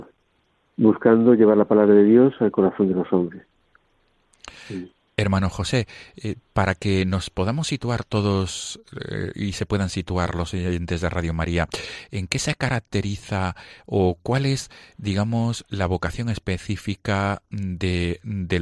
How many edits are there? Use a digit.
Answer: 0